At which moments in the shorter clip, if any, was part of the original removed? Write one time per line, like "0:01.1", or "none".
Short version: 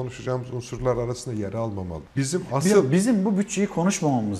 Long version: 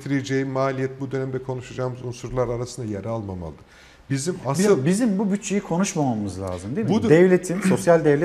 0:02.1